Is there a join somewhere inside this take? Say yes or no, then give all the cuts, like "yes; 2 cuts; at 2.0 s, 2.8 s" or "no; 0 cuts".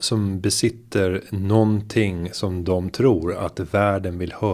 no; 0 cuts